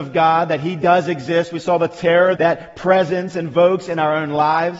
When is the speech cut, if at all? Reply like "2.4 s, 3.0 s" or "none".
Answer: 2.4 s